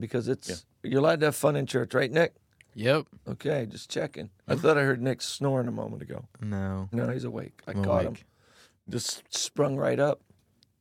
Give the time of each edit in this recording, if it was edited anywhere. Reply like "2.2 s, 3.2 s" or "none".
4.4 s